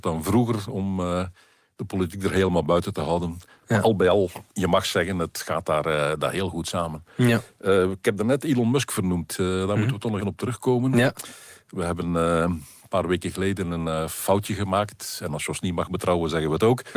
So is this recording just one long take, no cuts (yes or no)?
no